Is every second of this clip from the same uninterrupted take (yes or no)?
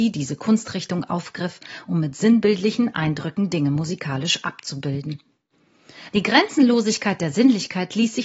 no